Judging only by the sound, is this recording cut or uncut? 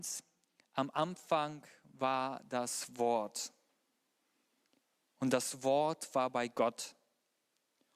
uncut